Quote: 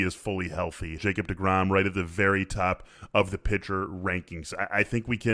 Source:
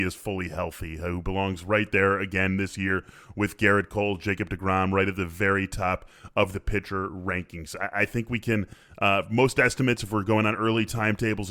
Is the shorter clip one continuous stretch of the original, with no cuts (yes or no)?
no